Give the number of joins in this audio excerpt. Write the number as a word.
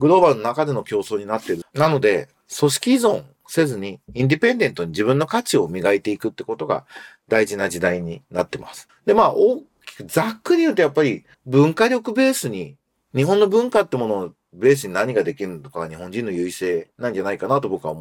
three